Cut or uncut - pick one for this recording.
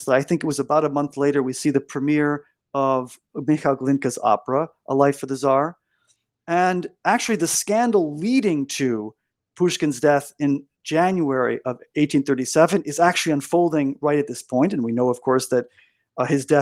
uncut